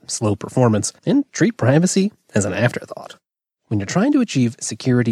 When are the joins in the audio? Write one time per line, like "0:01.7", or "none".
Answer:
0:01.0
0:03.6

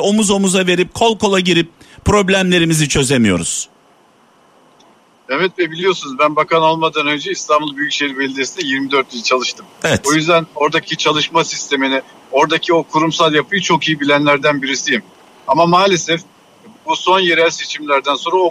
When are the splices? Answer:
none

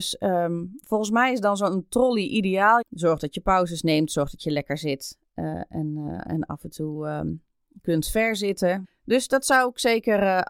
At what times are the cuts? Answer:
0:02.8
0:08.8

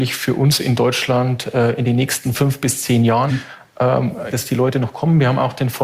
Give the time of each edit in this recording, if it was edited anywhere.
0:03.3
0:04.3

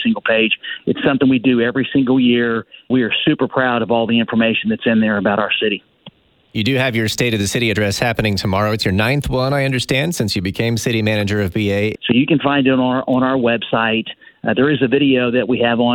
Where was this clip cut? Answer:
0:02.9
0:12.0

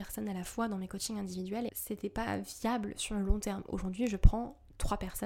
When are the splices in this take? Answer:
0:01.7

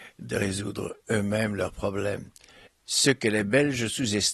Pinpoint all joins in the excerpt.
0:02.7

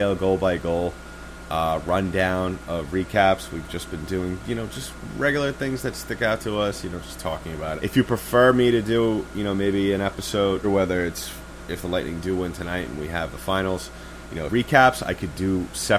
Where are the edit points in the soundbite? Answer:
0:07.8
0:10.6
0:14.5

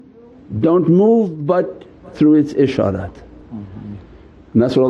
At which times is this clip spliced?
none

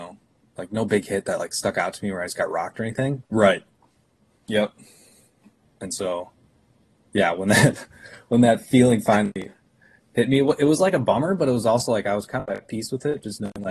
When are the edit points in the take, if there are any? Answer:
0:03.3
0:05.6

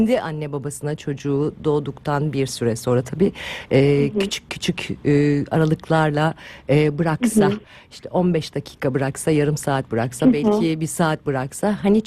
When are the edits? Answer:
none

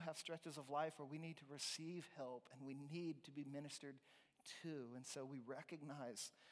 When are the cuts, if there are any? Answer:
none

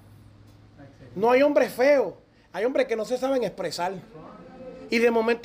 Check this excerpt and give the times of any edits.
none

